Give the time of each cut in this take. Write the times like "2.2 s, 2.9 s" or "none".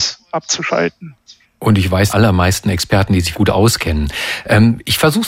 2.1 s, 3.3 s